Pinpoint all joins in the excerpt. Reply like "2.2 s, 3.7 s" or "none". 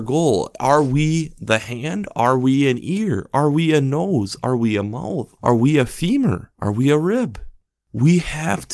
5.4 s